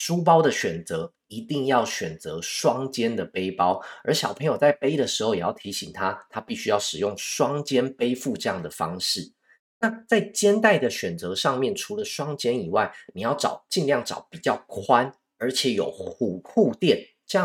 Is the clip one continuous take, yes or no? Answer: yes